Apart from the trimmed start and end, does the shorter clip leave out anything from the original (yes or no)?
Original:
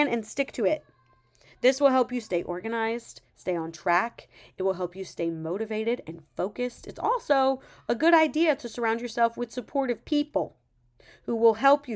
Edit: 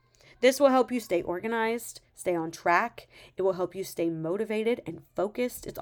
no